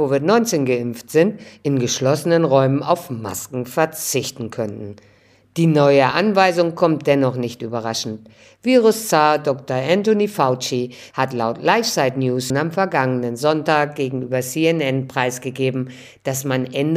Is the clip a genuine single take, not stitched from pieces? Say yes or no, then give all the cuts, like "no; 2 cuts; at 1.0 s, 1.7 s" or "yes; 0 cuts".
no; 2 cuts; at 11.1 s, 12.5 s